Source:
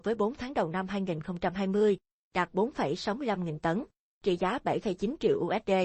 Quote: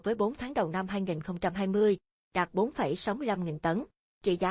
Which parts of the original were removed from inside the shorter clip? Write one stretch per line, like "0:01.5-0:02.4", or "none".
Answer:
none